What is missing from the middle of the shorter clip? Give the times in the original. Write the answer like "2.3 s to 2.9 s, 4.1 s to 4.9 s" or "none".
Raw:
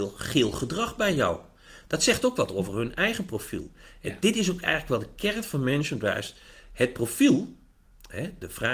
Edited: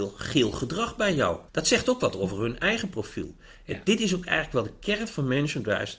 1.5 s to 1.8 s